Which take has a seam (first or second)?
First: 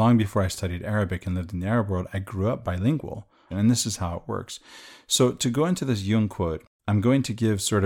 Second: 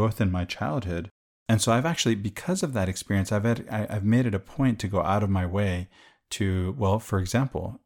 first